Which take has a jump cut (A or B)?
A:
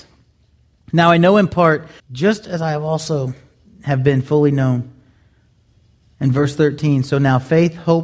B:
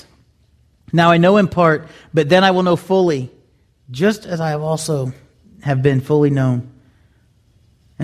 A